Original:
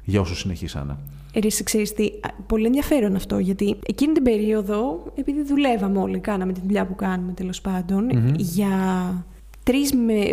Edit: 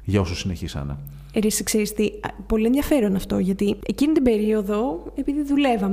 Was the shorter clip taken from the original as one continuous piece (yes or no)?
yes